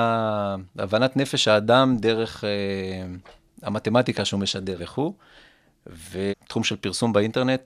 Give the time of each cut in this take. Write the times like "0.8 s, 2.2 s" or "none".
4.8 s, 6.3 s